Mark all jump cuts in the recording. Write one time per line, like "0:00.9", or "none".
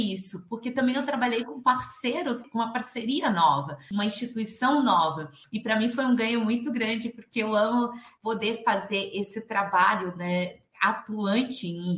none